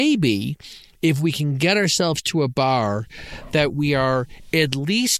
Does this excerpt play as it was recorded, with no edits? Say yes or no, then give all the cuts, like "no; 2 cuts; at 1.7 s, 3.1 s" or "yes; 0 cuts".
yes; 0 cuts